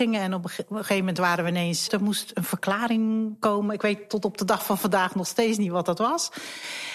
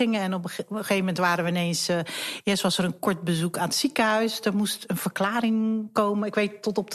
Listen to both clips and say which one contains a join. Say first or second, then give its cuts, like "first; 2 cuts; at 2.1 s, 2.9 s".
first; 1 cut; at 1.9 s